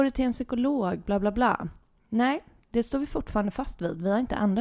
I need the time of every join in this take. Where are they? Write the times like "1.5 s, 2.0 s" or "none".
none